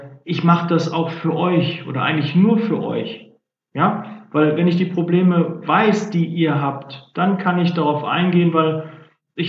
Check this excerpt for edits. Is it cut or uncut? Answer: uncut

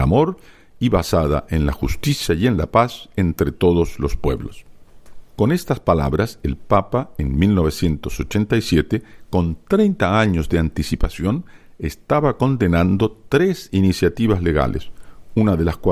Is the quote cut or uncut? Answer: uncut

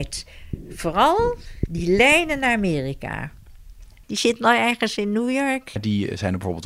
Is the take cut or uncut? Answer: cut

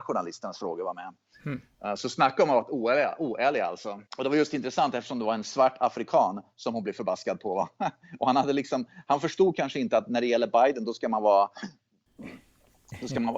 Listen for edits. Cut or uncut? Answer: cut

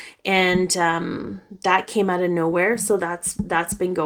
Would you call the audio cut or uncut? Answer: uncut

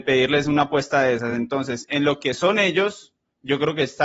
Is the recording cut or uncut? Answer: uncut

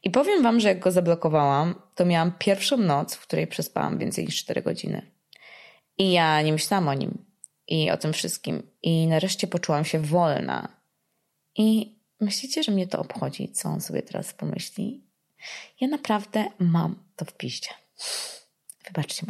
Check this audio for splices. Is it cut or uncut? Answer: uncut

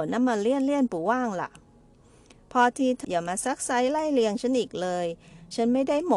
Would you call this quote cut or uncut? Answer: cut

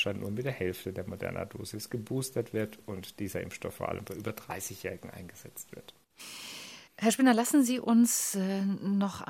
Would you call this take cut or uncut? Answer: cut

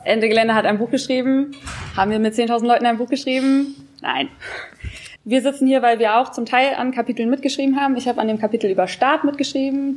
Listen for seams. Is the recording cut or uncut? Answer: cut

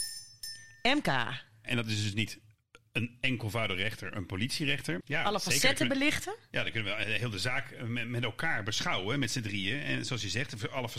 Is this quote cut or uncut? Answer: cut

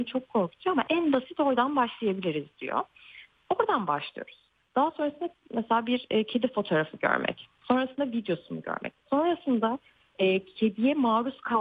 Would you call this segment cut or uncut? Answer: uncut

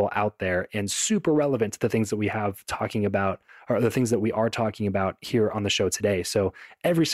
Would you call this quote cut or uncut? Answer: uncut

